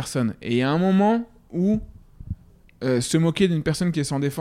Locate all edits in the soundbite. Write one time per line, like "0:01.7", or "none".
none